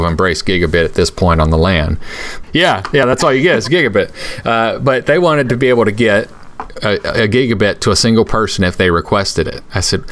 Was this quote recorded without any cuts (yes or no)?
no